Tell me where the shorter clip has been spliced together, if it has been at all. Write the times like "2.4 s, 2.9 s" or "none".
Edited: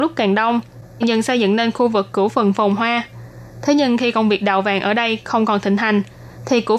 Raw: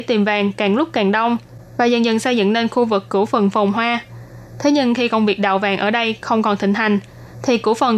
1.0 s

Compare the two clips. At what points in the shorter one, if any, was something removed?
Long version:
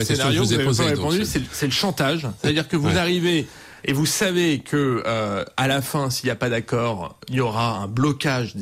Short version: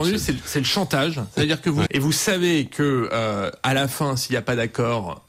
1.9 s

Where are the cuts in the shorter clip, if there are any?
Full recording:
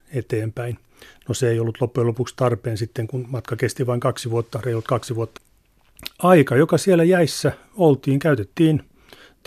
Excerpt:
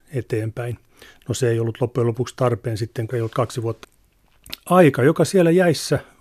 3.1 s

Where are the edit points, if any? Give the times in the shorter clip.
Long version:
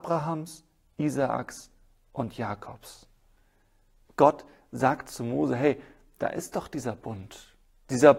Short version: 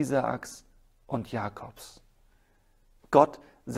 none

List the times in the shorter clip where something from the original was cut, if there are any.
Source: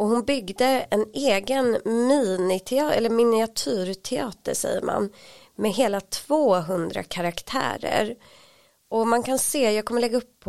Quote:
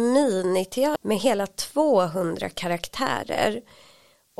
1.0 s

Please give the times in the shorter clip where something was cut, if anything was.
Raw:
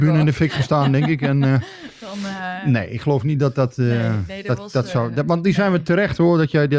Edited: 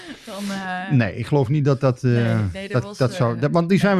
none

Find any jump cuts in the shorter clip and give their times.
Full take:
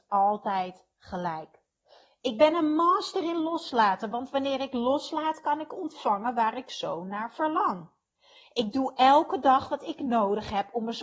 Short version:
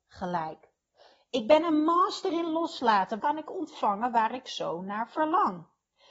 3.2 s

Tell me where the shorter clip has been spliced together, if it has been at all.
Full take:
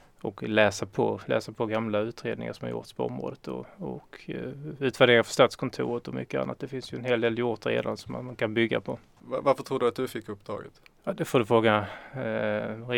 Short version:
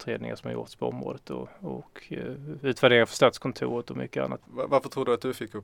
4.4 s

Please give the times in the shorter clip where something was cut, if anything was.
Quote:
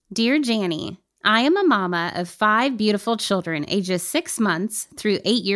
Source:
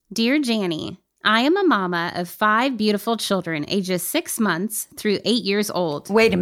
none

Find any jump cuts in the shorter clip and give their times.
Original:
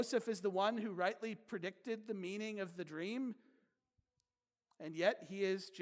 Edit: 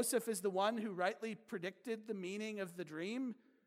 none

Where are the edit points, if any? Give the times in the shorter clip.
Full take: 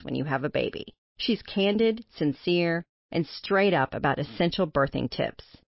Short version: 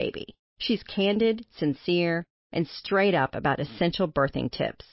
none

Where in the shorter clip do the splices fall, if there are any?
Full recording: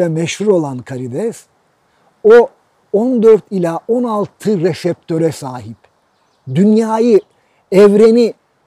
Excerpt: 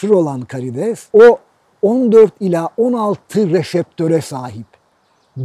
1.1 s

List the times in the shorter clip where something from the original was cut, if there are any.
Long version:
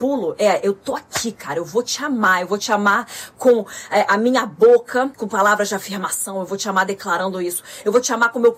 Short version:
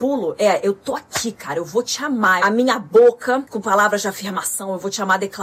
2.4 s

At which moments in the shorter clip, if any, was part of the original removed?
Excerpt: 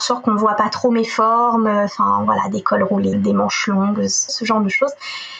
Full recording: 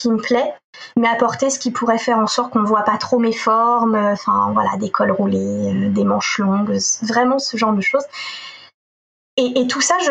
3.1 s, 4.3 s

